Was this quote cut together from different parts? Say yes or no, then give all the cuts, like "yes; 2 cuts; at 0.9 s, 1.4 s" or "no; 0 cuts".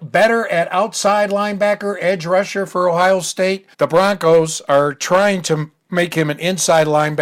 yes; 1 cut; at 3.7 s